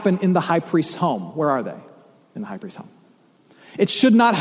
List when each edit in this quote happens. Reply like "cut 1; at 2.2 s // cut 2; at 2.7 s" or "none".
none